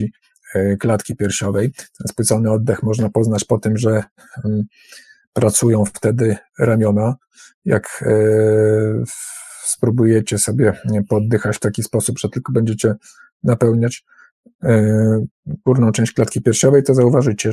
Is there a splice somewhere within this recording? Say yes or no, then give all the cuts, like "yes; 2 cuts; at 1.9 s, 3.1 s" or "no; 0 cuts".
no; 0 cuts